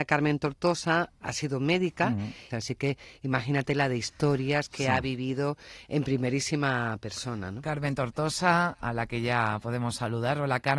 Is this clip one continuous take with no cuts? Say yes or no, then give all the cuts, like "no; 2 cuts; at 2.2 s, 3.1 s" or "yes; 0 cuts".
no; 1 cut; at 2.5 s